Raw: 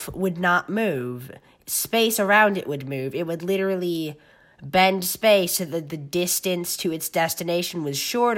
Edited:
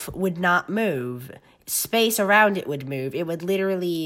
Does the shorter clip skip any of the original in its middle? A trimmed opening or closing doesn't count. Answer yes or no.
no